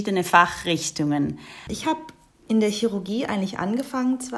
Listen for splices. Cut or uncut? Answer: cut